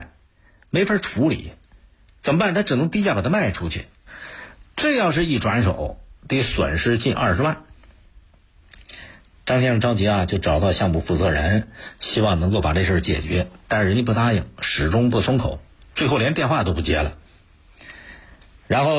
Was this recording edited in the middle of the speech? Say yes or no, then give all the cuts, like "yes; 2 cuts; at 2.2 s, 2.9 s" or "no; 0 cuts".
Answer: no; 0 cuts